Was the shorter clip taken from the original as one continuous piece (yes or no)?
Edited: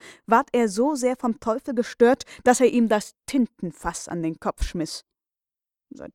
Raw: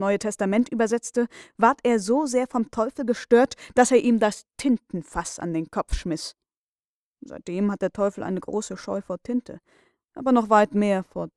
yes